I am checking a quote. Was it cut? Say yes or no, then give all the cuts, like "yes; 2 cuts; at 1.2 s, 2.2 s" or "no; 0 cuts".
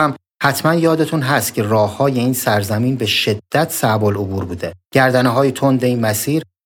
yes; 1 cut; at 4.8 s